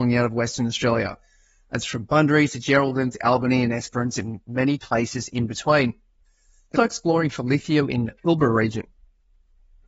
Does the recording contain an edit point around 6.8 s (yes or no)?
yes